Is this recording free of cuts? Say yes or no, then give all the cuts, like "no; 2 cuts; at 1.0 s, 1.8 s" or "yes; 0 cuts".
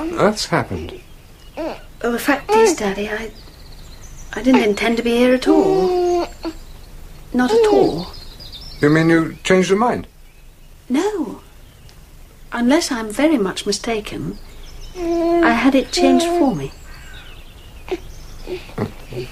yes; 0 cuts